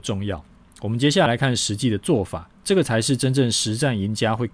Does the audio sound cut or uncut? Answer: cut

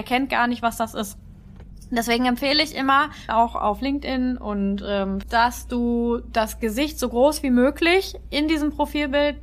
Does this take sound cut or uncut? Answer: cut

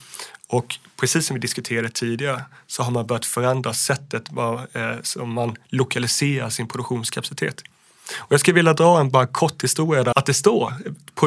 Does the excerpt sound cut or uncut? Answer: cut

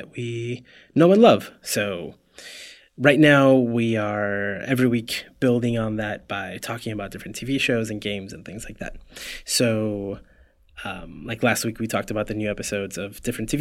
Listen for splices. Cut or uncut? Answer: uncut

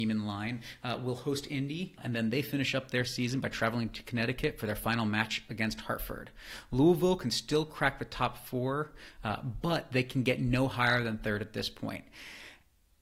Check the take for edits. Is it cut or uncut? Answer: cut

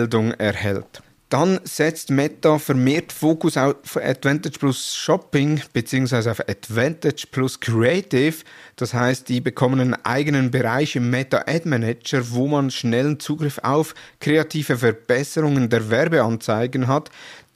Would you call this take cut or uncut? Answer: uncut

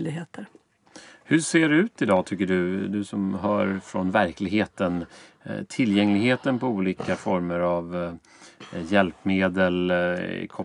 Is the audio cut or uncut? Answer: uncut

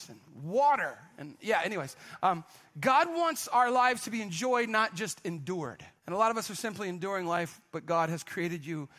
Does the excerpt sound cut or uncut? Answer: cut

